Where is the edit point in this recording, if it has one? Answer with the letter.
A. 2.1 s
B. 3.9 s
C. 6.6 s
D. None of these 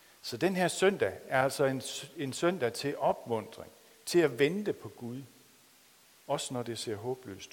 B